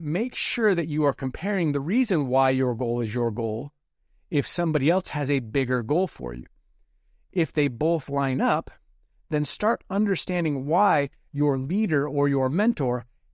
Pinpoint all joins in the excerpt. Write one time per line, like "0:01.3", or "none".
none